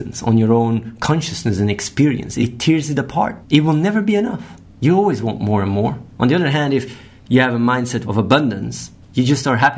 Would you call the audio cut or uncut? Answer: uncut